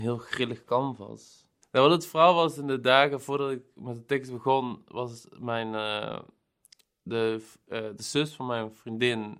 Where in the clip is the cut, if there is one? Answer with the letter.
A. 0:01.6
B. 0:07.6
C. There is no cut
A